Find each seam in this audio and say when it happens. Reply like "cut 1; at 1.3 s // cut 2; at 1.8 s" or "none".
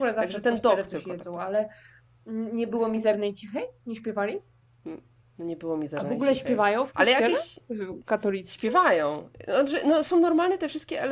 none